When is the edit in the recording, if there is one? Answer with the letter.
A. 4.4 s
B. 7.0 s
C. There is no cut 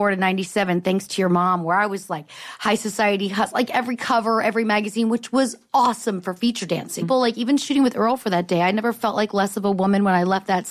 B